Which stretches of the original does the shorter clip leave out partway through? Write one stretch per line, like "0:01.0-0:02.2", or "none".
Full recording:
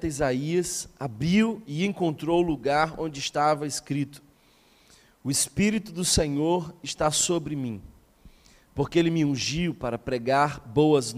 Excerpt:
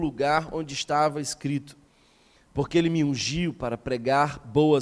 0:04.8-0:08.6